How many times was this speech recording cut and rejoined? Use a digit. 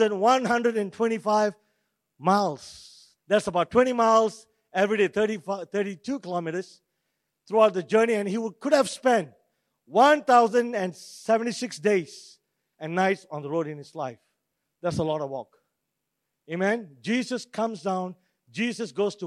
1